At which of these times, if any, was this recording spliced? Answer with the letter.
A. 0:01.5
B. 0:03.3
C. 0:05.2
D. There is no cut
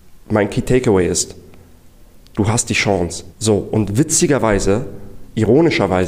B